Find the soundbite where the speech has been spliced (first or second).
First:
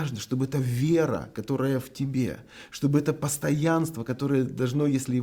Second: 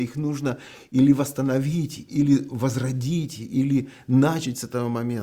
second